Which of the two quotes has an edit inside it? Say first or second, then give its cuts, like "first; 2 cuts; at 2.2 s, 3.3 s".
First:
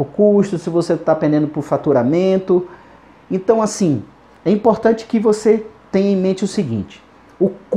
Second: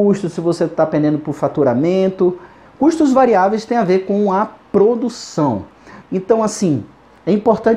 second; 2 cuts; at 2.7 s, 6.0 s